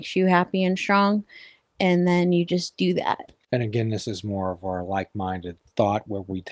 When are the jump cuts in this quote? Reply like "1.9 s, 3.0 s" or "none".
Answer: none